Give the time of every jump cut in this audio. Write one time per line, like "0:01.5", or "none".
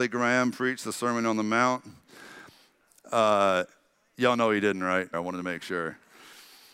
0:05.1